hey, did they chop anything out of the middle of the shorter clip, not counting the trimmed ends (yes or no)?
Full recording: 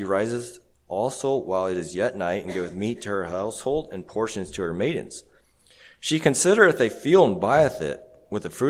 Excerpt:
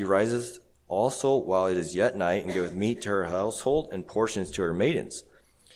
no